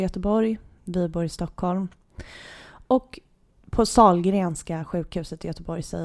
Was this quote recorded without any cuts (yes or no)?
no